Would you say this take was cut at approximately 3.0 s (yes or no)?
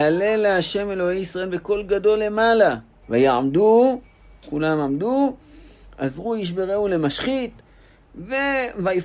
yes